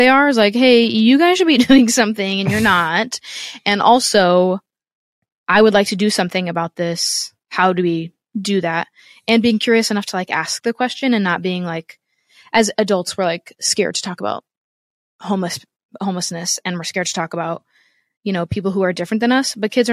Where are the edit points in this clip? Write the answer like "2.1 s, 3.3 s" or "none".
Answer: none